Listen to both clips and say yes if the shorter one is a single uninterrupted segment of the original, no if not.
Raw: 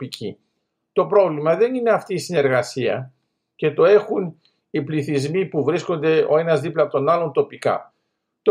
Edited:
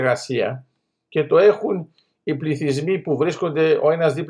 yes